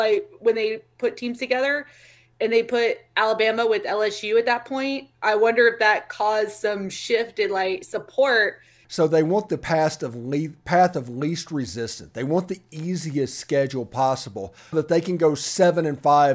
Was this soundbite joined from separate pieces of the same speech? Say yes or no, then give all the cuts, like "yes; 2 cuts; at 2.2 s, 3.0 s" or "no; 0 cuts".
yes; 2 cuts; at 8.8 s, 14.7 s